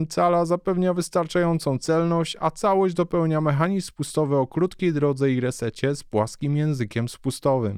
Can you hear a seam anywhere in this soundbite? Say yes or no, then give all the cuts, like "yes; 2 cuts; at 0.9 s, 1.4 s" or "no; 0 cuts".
no; 0 cuts